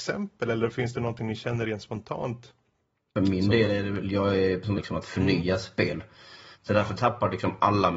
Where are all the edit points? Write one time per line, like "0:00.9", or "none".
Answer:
0:04.8
0:06.5